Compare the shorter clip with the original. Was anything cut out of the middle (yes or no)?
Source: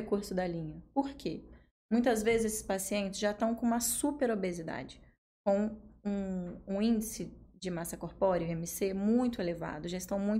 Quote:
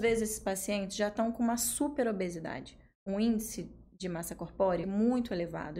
yes